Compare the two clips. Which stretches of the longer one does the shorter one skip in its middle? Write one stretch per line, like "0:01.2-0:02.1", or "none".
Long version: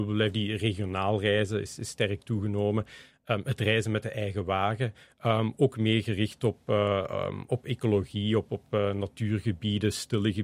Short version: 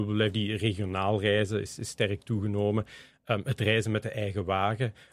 none